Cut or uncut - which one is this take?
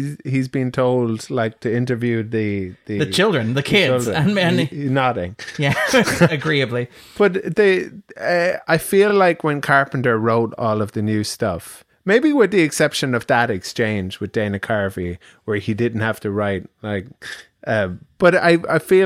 uncut